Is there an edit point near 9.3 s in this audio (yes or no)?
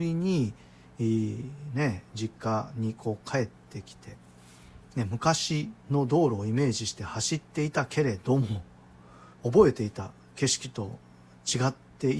yes